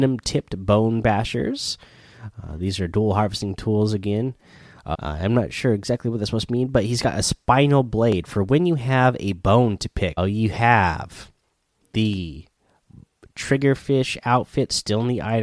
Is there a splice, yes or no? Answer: yes